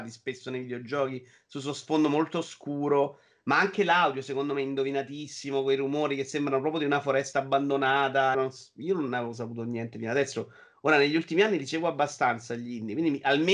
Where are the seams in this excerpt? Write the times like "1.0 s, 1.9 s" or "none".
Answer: 8.3 s